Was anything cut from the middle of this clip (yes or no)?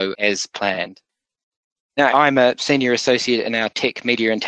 yes